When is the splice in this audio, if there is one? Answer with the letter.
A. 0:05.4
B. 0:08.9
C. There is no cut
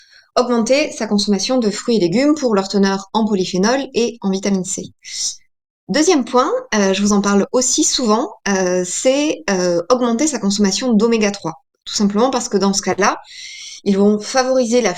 C